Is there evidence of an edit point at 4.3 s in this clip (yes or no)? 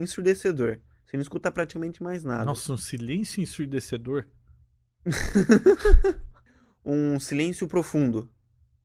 no